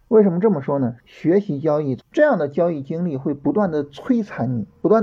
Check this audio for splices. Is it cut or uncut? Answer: cut